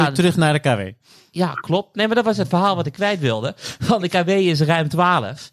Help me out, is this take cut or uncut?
uncut